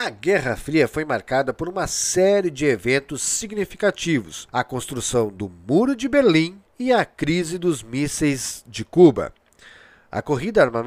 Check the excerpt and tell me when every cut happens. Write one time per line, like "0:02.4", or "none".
0:04.5
0:06.7